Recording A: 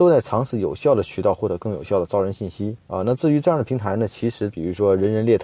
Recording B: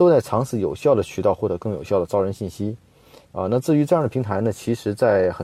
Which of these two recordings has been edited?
A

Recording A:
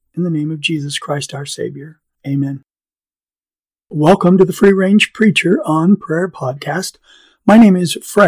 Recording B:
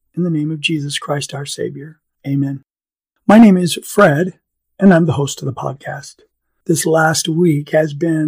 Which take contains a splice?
B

